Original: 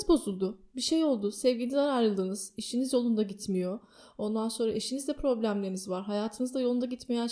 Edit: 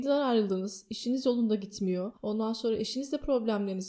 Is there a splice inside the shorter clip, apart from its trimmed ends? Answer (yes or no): yes